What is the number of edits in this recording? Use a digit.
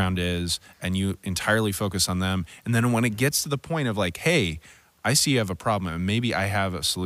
0